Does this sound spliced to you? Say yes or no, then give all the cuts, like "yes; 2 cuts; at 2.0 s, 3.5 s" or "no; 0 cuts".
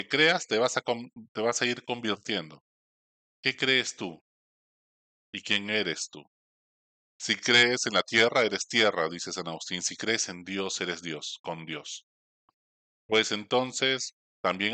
yes; 2 cuts; at 7.0 s, 13.0 s